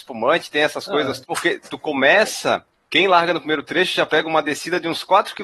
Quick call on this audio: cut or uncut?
cut